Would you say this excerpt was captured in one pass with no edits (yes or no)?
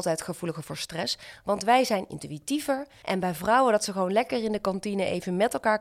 no